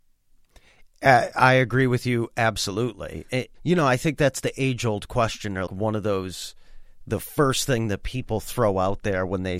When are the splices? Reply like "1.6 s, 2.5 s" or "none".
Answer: 3.5 s, 5.7 s